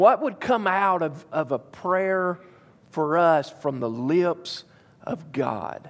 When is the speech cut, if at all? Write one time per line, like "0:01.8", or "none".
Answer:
none